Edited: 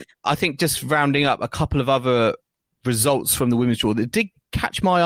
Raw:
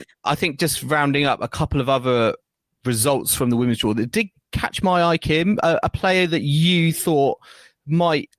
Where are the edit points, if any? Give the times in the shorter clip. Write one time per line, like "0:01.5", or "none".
none